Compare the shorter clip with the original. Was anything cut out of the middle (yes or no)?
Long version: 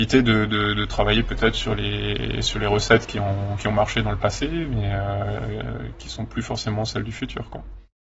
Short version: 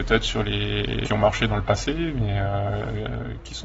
yes